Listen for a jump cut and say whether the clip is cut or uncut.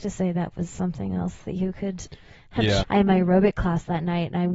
cut